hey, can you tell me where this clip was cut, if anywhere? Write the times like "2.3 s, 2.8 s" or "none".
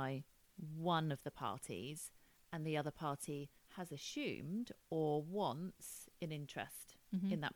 3.6 s